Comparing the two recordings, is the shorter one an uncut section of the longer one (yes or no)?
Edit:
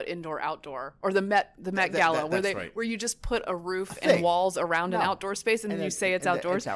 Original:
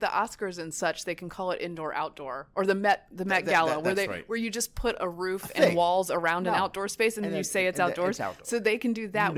yes